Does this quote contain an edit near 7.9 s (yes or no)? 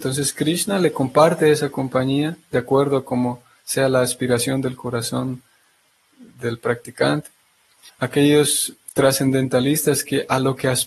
yes